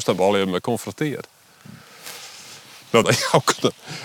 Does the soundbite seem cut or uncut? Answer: cut